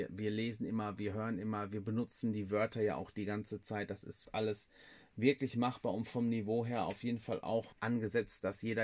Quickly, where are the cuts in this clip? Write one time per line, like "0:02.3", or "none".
0:04.3
0:07.7